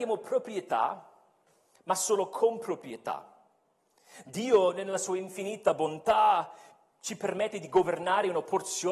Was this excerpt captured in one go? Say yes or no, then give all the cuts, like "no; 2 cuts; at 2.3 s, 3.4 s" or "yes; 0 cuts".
yes; 0 cuts